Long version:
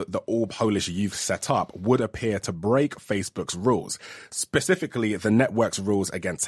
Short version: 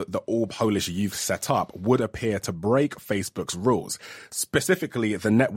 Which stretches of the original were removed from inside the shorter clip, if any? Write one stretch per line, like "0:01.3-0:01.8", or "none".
none